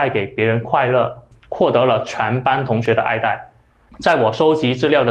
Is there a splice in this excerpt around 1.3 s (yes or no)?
yes